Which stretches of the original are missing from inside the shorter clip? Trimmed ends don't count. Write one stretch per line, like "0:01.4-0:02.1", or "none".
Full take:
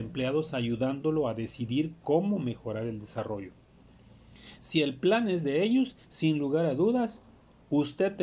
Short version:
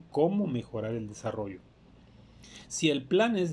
none